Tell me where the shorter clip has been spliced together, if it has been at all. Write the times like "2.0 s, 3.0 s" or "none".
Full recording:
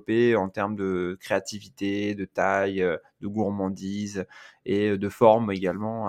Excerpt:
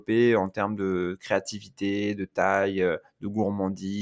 none